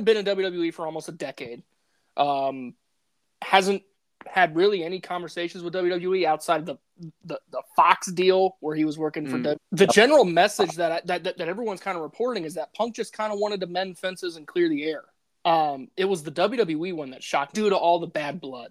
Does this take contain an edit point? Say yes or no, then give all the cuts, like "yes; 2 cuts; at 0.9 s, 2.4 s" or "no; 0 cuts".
yes; 3 cuts; at 9.6 s, 15.3 s, 17.5 s